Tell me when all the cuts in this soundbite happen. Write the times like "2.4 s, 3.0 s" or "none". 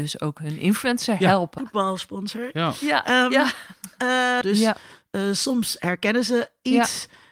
1.6 s, 4.4 s